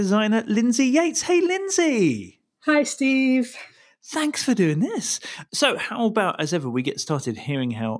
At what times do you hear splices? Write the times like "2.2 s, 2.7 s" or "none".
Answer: none